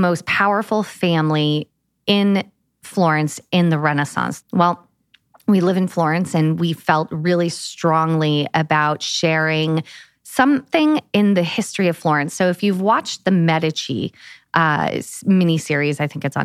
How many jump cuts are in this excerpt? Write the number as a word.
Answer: one